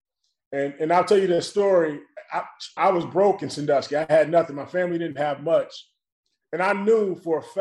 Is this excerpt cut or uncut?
cut